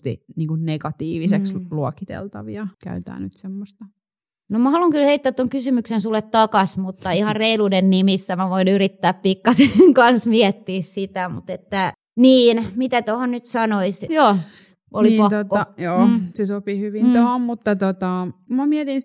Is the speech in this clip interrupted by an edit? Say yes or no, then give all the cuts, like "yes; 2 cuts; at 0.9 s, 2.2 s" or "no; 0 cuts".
yes; 2 cuts; at 2.7 s, 14.1 s